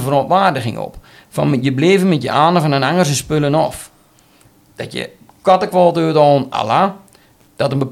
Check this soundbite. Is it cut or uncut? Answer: uncut